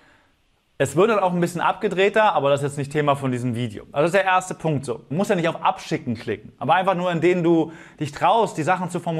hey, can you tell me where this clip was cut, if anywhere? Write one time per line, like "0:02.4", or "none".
0:05.1